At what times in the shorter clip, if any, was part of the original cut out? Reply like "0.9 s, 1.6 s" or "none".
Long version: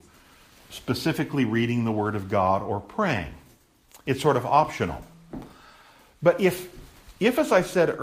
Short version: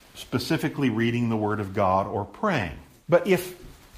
3.0 s